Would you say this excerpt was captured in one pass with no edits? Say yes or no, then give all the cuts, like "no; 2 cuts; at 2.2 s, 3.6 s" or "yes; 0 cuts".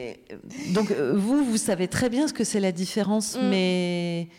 yes; 0 cuts